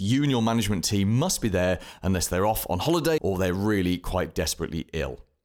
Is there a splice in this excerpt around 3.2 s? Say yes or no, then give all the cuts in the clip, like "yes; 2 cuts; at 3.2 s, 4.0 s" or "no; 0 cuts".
yes; 1 cut; at 3.2 s